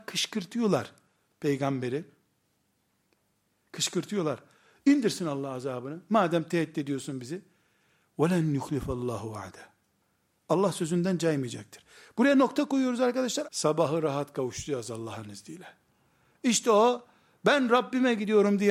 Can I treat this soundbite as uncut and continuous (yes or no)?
no